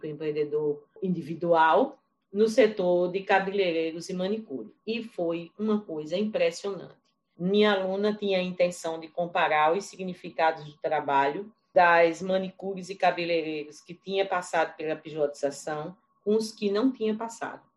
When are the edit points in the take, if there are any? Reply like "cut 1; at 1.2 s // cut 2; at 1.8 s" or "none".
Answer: none